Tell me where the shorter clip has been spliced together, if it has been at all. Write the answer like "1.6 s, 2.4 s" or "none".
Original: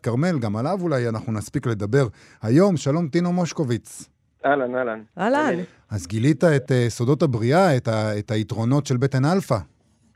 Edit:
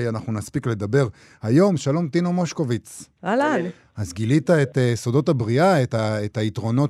3.2 s